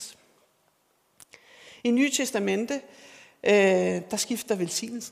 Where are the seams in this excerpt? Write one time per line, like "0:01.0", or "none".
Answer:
none